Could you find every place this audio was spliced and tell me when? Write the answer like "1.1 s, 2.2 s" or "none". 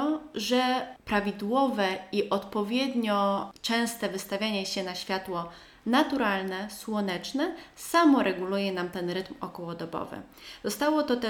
none